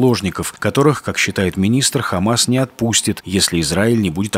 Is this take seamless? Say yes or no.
yes